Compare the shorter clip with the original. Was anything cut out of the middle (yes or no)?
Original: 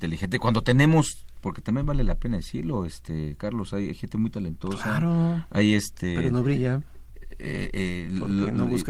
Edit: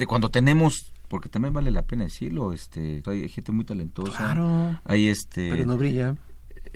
yes